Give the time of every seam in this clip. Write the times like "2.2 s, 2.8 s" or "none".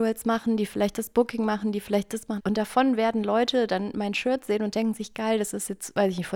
2.4 s